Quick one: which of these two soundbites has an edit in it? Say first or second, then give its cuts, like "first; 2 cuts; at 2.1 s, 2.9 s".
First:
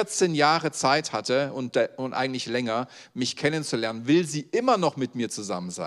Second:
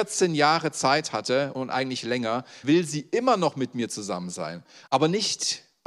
second; 3 cuts; at 1.5 s, 2.6 s, 4.9 s